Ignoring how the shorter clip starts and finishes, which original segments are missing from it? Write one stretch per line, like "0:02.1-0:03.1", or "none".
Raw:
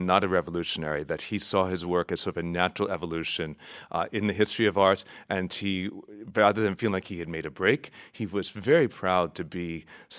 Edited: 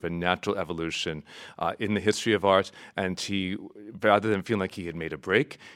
none